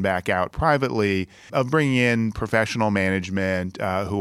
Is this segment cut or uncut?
cut